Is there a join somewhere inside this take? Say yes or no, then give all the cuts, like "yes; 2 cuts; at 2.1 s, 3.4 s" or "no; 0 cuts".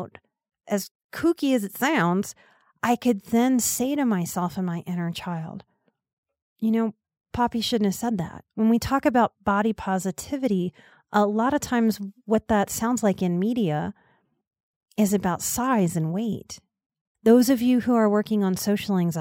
yes; 2 cuts; at 8.5 s, 17.1 s